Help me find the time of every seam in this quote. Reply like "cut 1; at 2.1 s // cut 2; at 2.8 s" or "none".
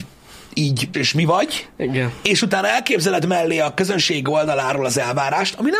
cut 1; at 0.9 s